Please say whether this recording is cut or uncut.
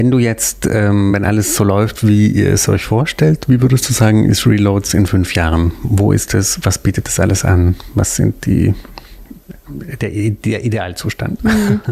uncut